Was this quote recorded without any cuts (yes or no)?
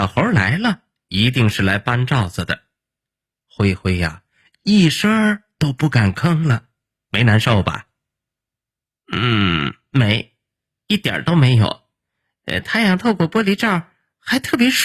no